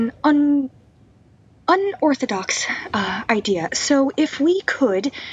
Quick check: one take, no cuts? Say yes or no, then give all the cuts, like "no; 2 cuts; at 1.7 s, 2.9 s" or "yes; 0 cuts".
no; 1 cut; at 3.7 s